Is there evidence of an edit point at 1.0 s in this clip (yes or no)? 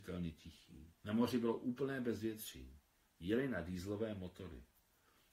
yes